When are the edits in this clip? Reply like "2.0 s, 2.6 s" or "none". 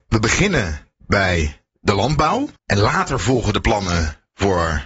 2.6 s